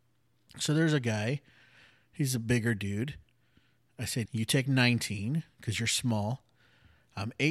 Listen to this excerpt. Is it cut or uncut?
cut